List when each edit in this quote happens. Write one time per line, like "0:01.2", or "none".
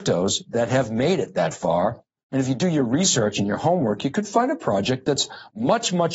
none

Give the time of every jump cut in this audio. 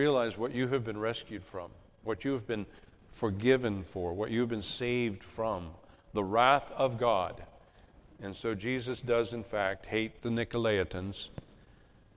none

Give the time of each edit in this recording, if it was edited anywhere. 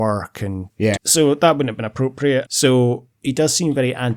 0:01.0
0:02.4

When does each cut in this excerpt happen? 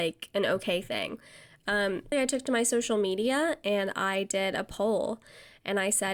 0:02.1

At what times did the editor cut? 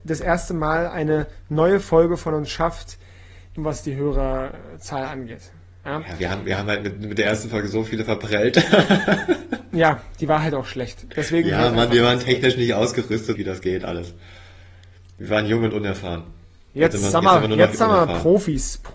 0:03.6
0:13.4

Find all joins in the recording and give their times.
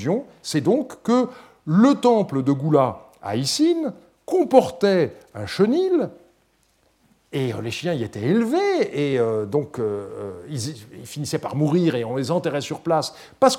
none

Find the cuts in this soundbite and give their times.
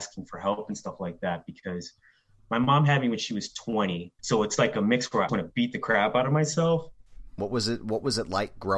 0:04.2
0:05.3
0:07.4

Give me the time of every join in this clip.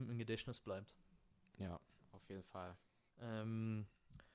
0:03.1

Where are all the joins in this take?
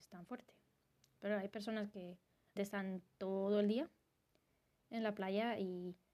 0:02.6

